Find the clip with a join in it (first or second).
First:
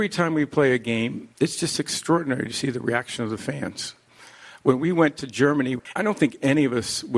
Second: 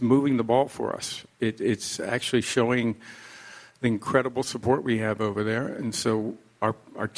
first